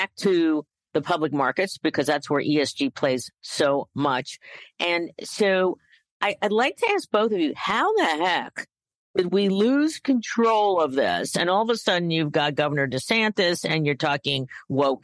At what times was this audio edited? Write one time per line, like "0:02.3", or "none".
none